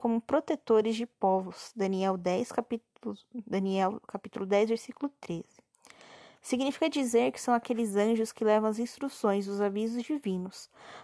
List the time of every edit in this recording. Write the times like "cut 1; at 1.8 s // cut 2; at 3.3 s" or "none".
none